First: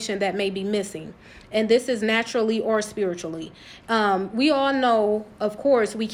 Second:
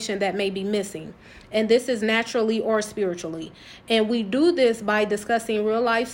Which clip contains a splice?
first; 1 cut; at 3.8 s

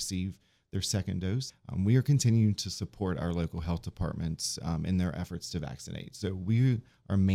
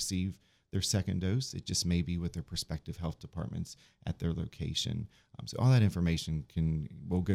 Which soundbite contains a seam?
first; 1 cut; at 1.5 s

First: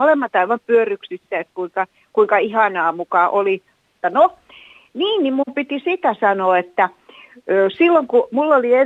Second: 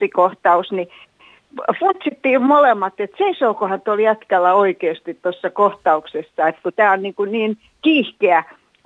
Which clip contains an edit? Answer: first; 1 cut; at 4.0 s

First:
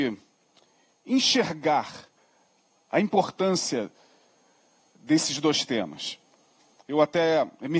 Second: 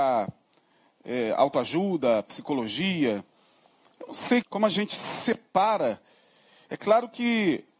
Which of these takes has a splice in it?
second; 1 cut; at 4.4 s

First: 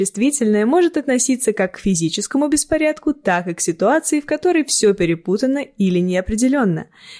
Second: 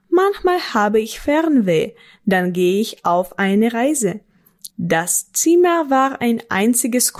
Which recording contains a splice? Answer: second; 1 cut; at 4.7 s

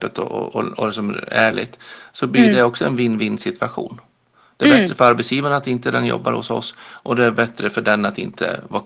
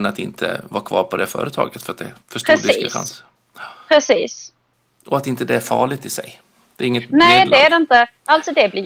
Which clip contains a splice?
second; 1 cut; at 2.2 s

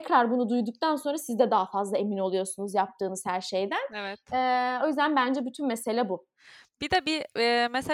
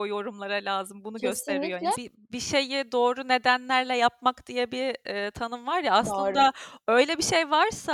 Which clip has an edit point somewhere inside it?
second; 1 cut; at 1.9 s

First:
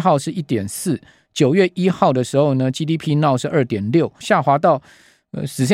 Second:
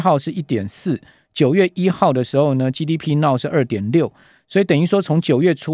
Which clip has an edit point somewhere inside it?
first; 1 cut; at 4.2 s

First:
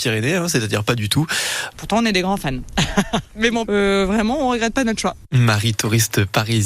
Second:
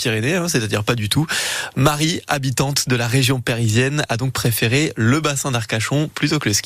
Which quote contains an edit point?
first; 2 cuts; at 1.7 s, 3.6 s

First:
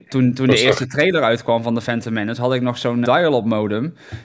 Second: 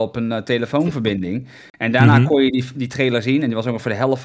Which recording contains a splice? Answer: first; 1 cut; at 3.0 s

